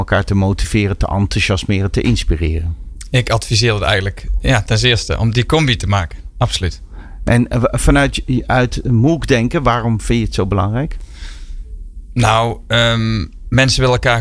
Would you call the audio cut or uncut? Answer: uncut